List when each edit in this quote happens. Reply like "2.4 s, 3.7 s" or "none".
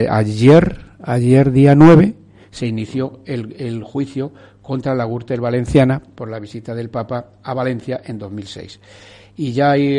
none